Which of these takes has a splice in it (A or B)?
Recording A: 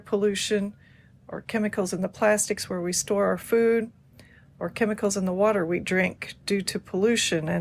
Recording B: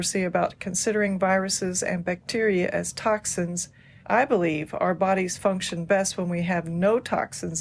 B